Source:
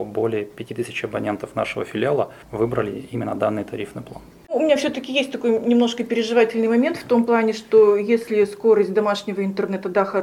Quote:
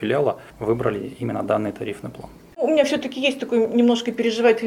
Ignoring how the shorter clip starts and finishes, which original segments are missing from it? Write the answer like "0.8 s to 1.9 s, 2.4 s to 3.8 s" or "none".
none